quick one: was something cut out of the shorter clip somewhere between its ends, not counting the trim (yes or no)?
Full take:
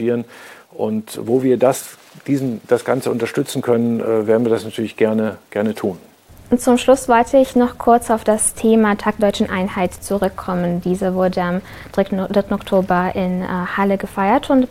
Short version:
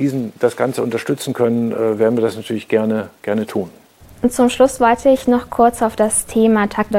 no